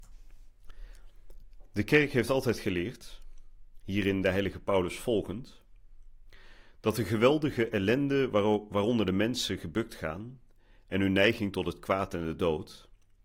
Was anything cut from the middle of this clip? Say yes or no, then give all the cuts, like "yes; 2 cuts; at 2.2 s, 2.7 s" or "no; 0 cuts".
no; 0 cuts